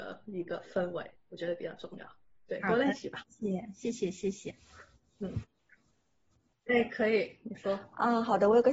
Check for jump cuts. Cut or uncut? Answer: cut